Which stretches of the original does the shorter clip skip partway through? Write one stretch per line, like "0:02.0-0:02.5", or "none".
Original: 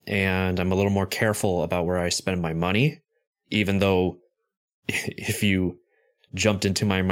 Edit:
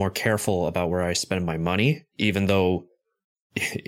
0:03.0-0:03.4